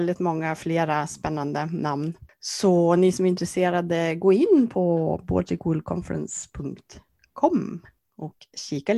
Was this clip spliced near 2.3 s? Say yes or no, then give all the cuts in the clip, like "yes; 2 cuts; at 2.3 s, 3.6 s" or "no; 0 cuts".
no; 0 cuts